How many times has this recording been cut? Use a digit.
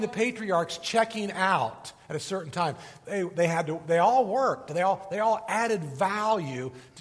0